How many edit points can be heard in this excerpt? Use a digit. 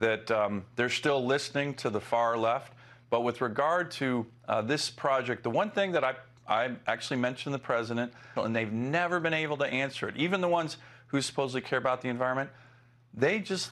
1